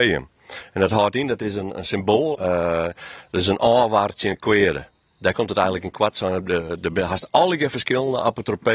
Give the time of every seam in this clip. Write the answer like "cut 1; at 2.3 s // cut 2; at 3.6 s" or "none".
cut 1; at 2.3 s